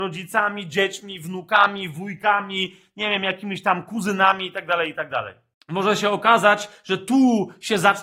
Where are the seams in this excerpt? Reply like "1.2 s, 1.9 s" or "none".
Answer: 5.5 s

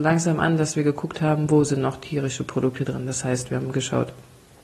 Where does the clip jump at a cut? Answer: none

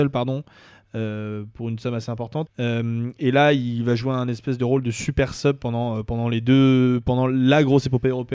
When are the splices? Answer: 2.5 s

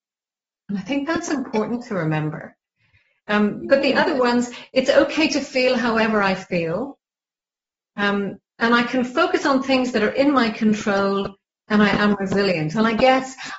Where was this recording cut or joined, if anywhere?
none

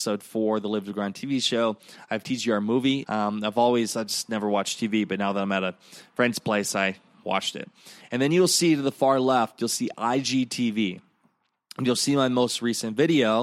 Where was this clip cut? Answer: 3.0 s

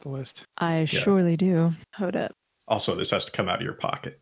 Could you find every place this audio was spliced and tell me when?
1.8 s

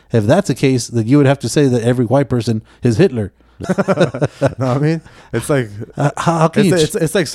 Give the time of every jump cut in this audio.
3.6 s, 5.9 s

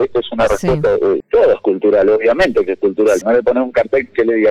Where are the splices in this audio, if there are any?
1.2 s, 3.2 s

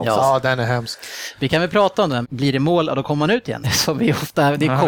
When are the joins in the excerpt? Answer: 2.2 s, 3.6 s

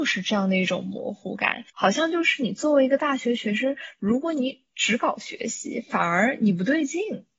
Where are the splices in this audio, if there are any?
1.7 s

